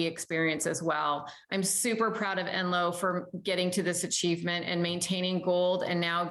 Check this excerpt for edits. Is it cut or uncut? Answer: uncut